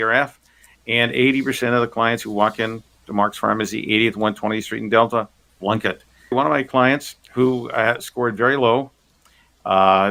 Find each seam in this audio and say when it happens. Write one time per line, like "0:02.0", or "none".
0:06.3